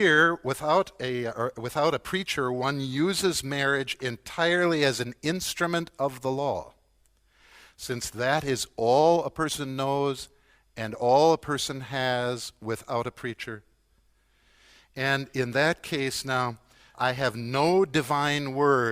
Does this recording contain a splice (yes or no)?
yes